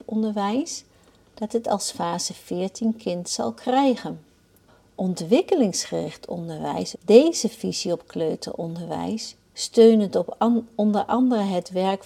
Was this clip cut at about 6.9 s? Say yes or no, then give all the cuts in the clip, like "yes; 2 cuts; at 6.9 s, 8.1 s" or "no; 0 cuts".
yes; 1 cut; at 6.9 s